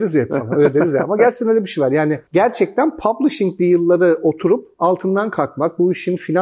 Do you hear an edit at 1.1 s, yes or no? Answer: no